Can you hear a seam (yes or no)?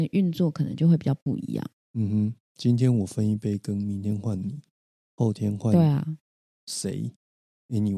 no